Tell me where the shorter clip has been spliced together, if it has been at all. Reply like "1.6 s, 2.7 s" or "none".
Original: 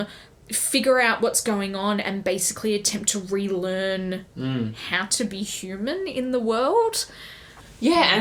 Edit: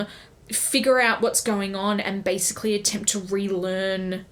none